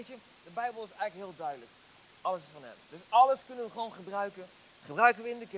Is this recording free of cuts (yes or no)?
no